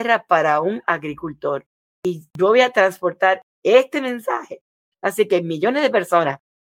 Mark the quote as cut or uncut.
cut